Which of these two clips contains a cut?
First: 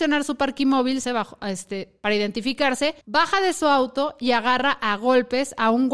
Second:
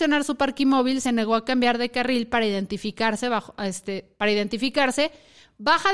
first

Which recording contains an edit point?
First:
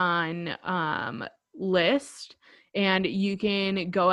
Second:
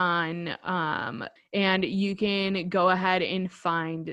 second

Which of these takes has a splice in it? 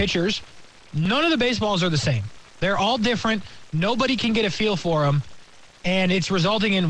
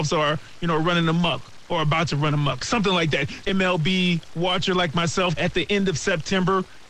second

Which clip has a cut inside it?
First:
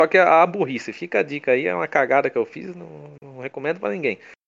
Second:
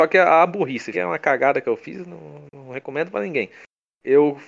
second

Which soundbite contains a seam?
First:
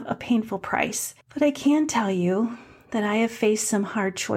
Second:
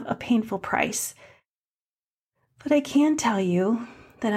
first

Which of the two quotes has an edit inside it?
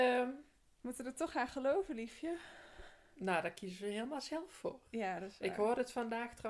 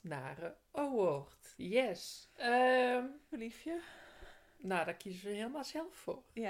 second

